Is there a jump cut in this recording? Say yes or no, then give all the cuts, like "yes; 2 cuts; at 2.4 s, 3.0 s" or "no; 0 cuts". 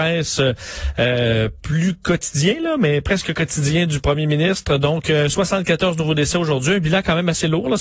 no; 0 cuts